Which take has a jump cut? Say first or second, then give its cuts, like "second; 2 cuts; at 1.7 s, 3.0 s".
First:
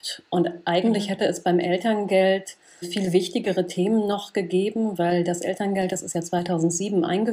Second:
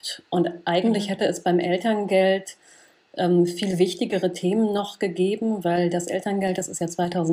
first; 1 cut; at 2.8 s